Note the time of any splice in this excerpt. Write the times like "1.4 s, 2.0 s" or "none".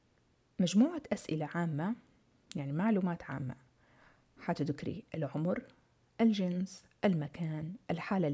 none

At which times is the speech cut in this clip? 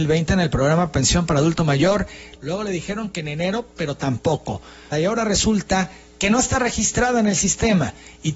2.4 s, 4.9 s

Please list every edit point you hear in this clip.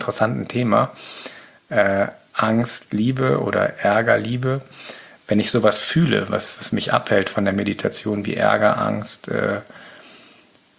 none

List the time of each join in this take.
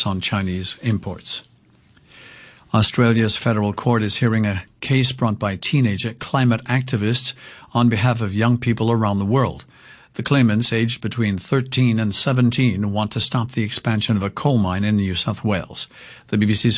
none

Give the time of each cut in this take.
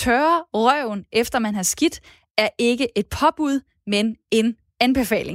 none

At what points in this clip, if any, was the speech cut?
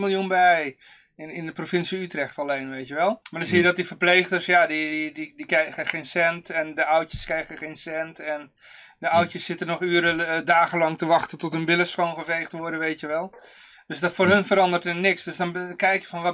3.2 s

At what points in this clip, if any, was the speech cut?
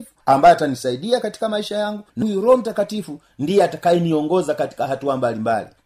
2.2 s

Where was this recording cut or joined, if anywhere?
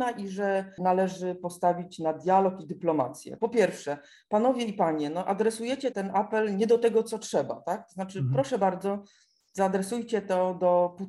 3.4 s, 5.9 s

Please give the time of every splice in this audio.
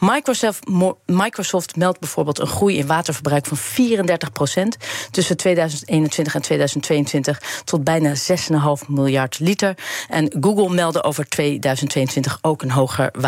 none

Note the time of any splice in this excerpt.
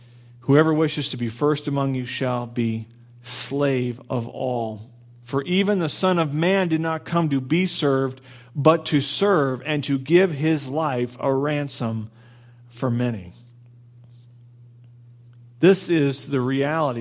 none

